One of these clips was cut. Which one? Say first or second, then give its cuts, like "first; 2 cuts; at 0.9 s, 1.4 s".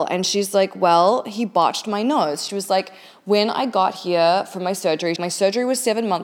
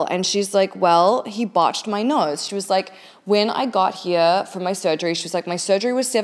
first; 1 cut; at 5.2 s